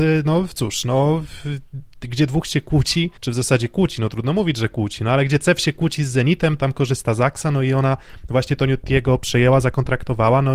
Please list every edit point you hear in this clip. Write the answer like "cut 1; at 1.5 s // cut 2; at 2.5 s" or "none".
cut 1; at 3.2 s